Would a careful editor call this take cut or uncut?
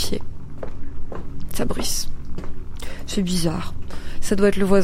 uncut